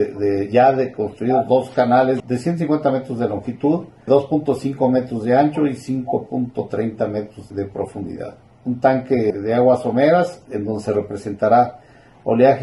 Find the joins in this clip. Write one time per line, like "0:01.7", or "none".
none